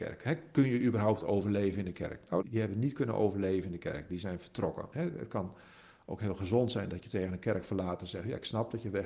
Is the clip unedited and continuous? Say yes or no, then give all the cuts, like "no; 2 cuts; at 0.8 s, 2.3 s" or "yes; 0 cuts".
no; 2 cuts; at 2.4 s, 4.9 s